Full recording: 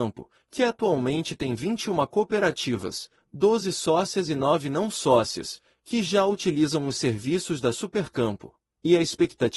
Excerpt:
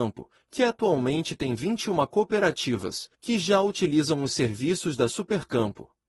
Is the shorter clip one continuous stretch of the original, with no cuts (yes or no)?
no